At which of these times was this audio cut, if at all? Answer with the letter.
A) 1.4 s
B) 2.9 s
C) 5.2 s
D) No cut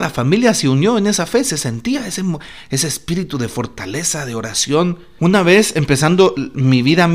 C